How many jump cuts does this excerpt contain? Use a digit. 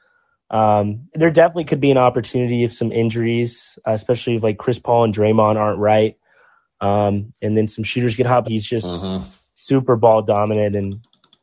2